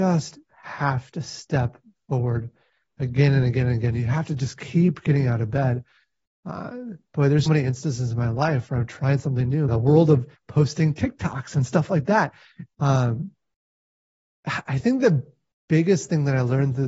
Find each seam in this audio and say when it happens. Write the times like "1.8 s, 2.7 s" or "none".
7.5 s, 9.7 s, 12.7 s